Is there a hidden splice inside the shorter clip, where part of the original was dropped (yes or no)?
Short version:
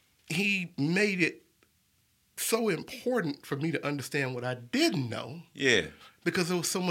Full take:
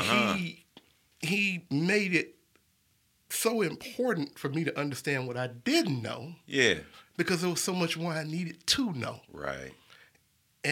no